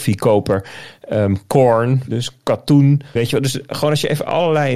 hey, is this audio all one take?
no; 2 cuts; at 2.1 s, 3.2 s

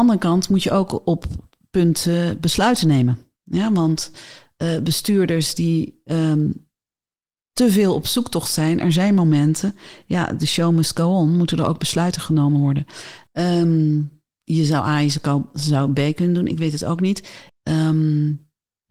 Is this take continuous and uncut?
no; 2 cuts; at 13.3 s, 17.5 s

